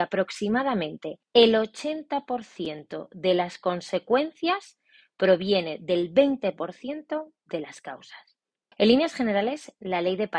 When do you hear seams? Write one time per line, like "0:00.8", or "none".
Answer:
0:01.2
0:08.7